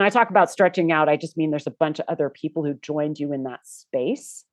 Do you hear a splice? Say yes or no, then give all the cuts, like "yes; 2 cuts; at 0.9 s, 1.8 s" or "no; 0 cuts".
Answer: no; 0 cuts